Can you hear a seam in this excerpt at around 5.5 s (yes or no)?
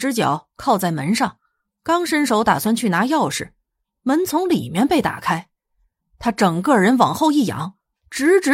no